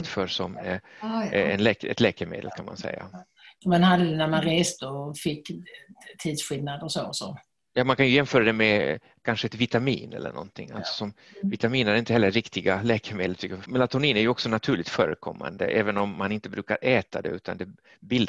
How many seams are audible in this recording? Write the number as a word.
one